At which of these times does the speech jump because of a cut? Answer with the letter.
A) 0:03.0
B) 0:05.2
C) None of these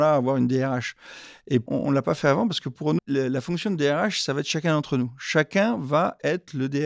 A